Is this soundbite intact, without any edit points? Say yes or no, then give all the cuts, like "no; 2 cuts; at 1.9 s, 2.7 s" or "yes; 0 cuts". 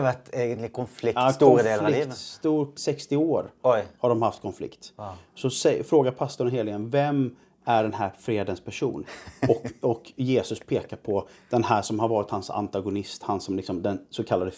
no; 1 cut; at 2.8 s